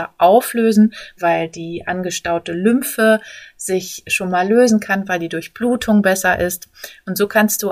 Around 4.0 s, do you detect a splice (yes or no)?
no